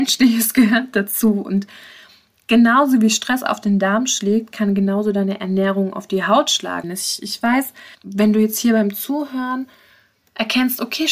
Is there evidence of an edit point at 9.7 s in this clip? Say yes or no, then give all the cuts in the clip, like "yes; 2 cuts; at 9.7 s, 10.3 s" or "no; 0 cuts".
no; 2 cuts; at 6.8 s, 7.9 s